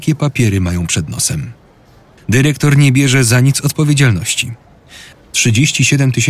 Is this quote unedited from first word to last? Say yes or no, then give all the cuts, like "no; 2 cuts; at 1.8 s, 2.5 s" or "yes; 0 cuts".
no; 2 cuts; at 2.2 s, 5.1 s